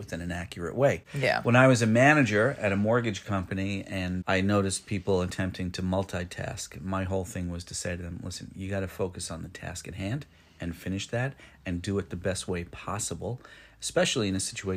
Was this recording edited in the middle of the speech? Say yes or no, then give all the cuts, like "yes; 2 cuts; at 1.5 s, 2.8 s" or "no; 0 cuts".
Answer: yes; 1 cut; at 1.1 s